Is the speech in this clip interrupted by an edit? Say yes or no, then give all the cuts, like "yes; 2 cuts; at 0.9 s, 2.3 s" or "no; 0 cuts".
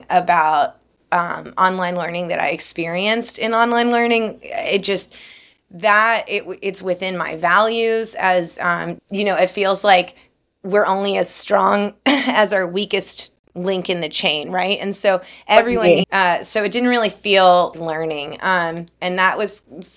yes; 3 cuts; at 9.0 s, 16.0 s, 17.7 s